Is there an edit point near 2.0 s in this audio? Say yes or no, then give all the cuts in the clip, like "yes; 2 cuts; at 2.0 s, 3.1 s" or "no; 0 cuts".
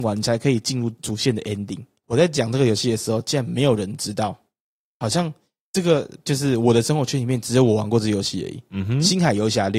yes; 1 cut; at 2.0 s